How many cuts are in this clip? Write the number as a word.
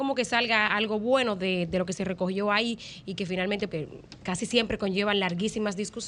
one